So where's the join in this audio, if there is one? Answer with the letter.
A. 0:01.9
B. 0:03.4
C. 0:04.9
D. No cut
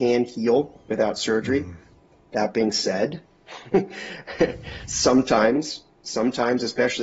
D